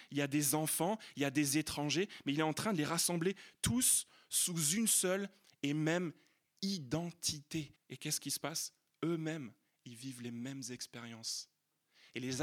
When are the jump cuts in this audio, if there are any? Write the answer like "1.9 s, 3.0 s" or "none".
7.7 s